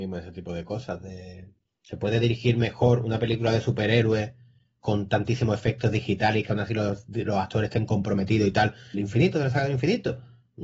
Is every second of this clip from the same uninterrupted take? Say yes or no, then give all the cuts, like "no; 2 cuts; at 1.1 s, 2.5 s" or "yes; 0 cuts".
no; 2 cuts; at 1.8 s, 8.9 s